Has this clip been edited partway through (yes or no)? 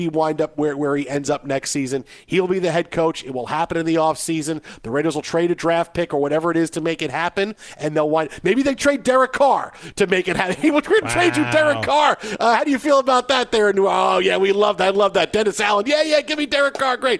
no